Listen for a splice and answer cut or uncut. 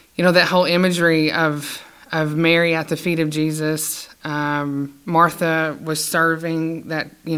uncut